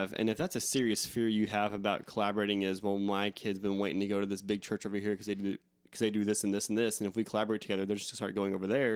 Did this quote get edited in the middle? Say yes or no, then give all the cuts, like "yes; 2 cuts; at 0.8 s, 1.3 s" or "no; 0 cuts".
no; 0 cuts